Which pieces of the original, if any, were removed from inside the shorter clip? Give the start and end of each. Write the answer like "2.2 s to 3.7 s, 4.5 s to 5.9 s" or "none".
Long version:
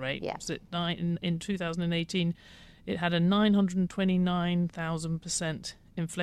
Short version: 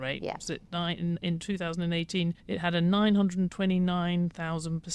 2.4 s to 2.8 s